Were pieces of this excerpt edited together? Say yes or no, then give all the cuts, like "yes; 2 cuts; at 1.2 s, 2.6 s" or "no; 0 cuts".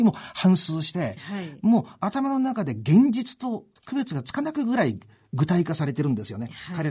yes; 1 cut; at 3.8 s